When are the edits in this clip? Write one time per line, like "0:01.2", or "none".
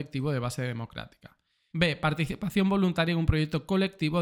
0:01.7